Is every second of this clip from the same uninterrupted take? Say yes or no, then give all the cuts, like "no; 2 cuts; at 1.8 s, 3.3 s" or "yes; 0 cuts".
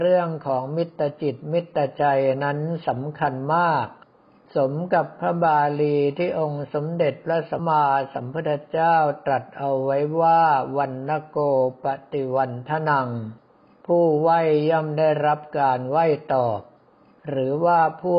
no; 1 cut; at 7.6 s